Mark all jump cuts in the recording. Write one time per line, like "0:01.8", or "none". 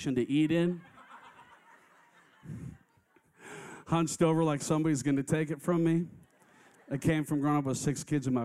none